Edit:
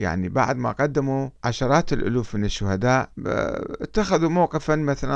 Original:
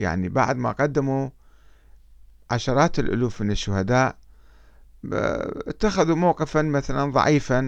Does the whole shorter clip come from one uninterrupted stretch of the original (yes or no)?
no